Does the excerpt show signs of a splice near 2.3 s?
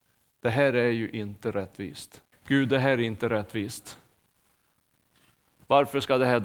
yes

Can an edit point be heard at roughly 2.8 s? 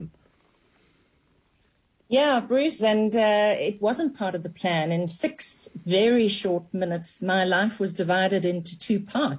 yes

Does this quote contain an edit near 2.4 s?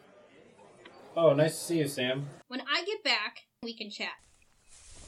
yes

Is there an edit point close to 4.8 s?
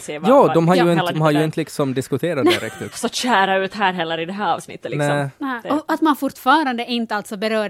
no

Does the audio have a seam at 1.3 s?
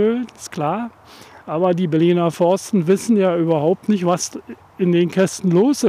no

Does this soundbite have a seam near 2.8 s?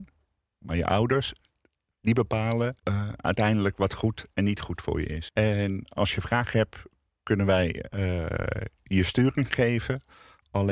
yes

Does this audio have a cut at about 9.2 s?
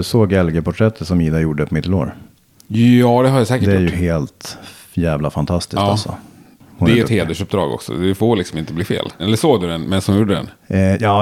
yes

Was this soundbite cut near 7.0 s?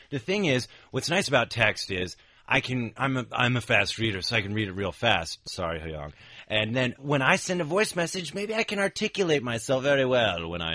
yes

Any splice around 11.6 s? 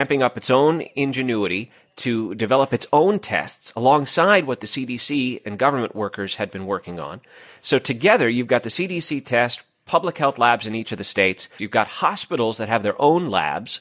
yes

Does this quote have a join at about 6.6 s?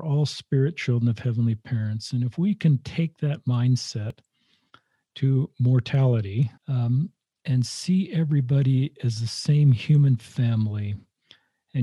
yes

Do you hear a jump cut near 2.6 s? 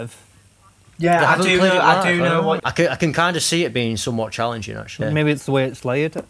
yes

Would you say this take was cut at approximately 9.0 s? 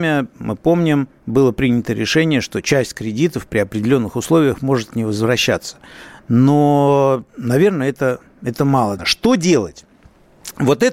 yes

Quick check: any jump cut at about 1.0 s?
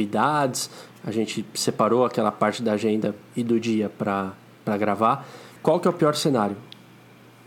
no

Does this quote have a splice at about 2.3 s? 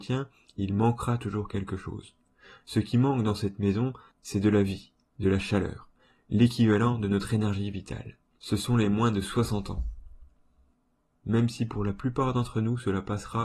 no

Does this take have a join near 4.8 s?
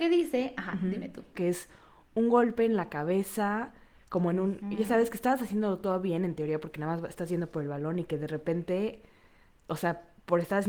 no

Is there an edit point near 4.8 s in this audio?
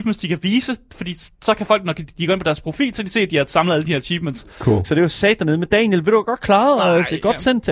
yes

